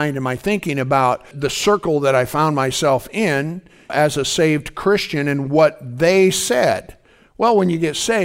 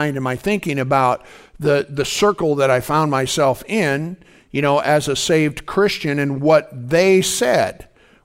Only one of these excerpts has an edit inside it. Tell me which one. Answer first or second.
first